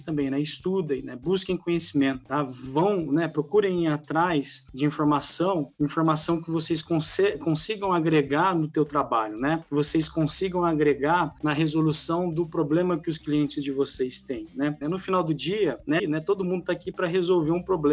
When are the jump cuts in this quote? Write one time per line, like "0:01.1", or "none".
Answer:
0:14.8
0:16.0